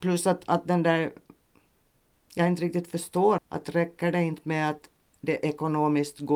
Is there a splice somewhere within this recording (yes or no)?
yes